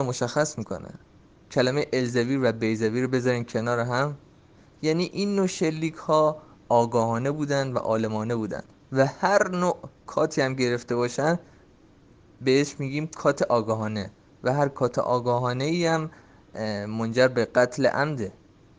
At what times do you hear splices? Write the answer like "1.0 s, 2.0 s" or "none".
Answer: none